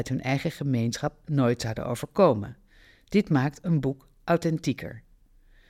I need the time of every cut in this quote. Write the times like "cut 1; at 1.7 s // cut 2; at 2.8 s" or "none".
none